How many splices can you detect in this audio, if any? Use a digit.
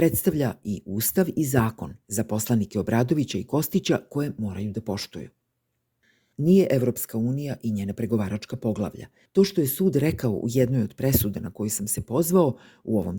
2